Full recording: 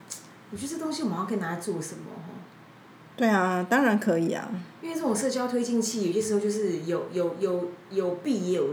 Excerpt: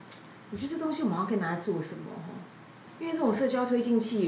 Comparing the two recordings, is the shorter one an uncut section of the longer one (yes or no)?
no